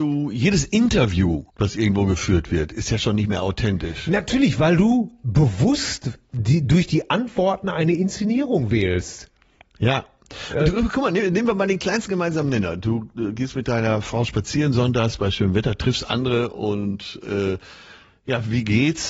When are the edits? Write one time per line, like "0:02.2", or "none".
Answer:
0:01.5